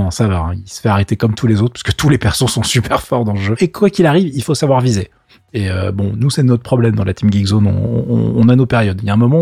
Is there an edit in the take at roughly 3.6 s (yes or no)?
yes